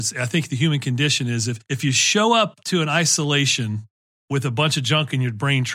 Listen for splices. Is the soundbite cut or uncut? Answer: uncut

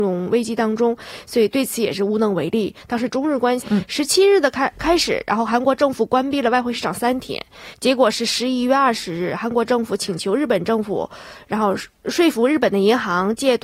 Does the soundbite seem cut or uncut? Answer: cut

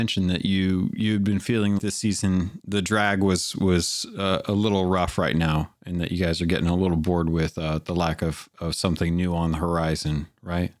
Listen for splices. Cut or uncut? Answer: cut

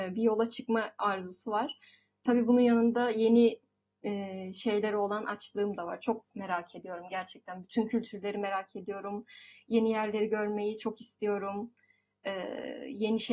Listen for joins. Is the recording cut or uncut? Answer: uncut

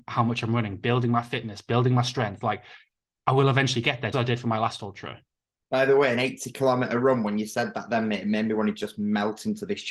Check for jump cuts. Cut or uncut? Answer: cut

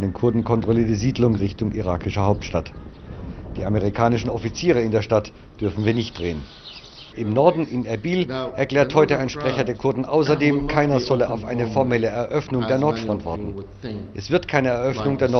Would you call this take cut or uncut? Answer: cut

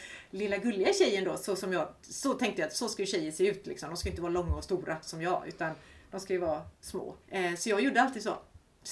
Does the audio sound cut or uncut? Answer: cut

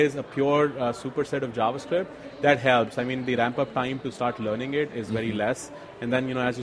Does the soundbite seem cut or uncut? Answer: uncut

